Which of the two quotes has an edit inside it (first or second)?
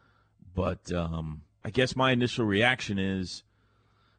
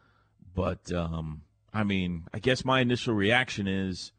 first